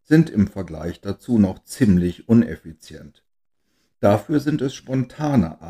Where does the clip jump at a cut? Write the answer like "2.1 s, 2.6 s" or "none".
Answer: none

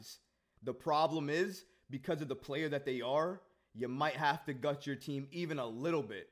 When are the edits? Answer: none

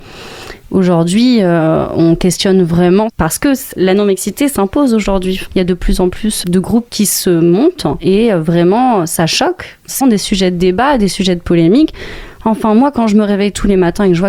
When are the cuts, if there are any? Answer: 10.0 s

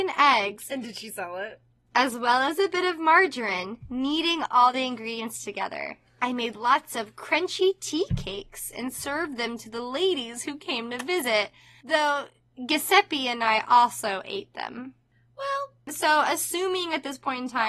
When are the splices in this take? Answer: none

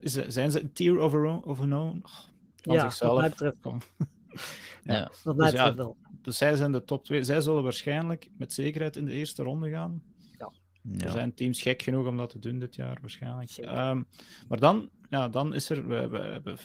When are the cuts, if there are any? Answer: none

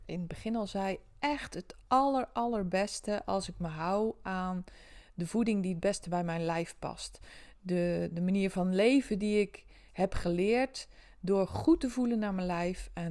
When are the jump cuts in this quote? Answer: 8.1 s

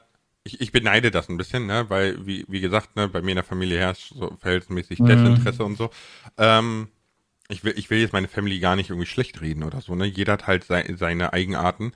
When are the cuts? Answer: none

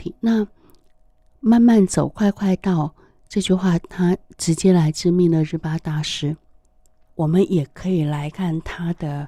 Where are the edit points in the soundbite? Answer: 7.0 s, 8.3 s

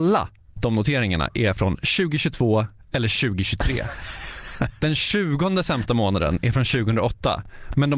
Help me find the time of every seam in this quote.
none

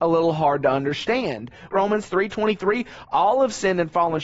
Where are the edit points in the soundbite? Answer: 1.7 s

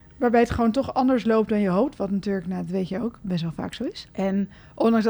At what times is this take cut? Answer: 4.1 s

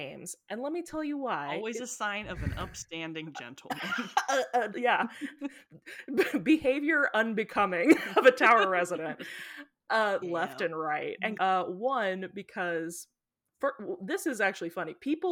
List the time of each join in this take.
4.7 s, 10.2 s, 11.4 s

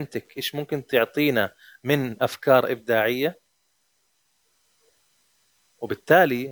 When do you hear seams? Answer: none

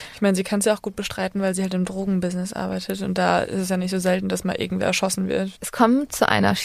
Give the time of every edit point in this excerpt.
5.6 s

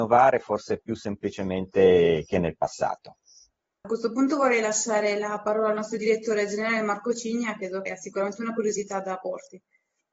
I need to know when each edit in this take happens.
3.8 s, 7.9 s

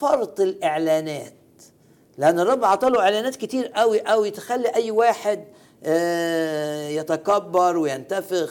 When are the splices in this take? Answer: none

